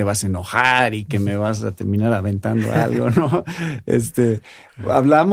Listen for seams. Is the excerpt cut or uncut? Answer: uncut